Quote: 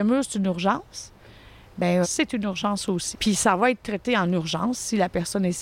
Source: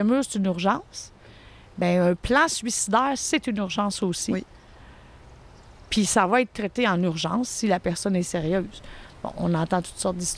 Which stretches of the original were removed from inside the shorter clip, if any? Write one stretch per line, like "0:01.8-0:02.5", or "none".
0:02.0-0:03.2
0:04.3-0:05.8